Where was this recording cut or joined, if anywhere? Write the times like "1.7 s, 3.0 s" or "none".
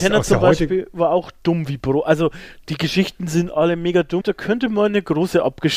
4.2 s

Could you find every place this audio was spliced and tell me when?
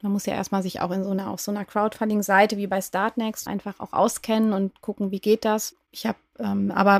3.5 s, 5.7 s

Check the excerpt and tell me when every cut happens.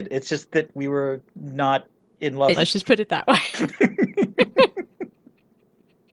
1.3 s, 2.5 s

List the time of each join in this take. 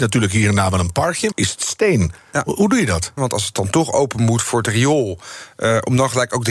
1.3 s, 3.2 s

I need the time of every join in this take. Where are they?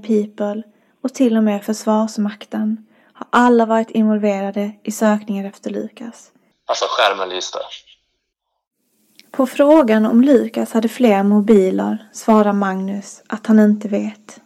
6.5 s

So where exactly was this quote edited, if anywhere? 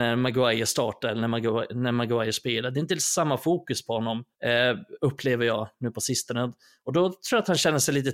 4.3 s

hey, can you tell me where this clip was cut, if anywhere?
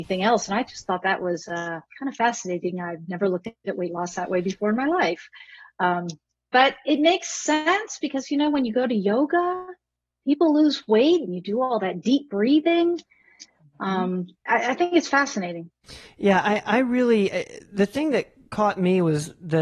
14.5 s

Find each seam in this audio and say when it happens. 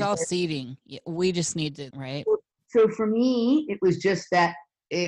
1.9 s

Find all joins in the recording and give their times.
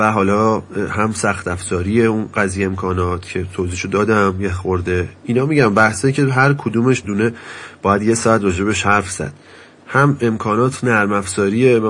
7.0 s

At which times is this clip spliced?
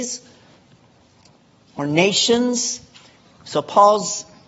3.2 s

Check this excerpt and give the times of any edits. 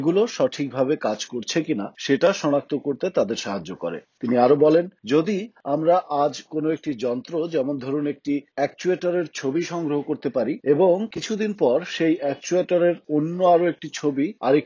1.9 s

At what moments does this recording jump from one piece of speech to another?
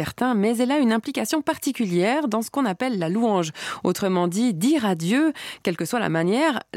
none

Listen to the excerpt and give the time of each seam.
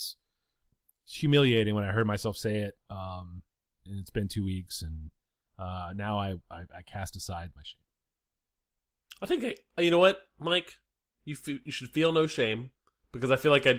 none

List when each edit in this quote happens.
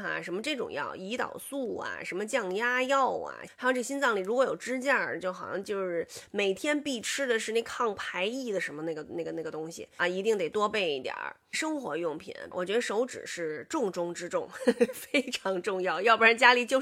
3.5 s, 10.0 s, 12.5 s

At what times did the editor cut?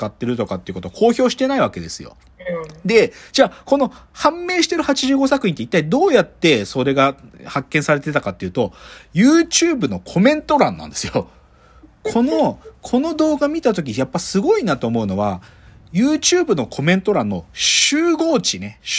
none

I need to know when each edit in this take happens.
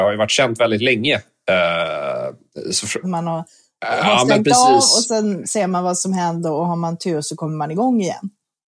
3.0 s

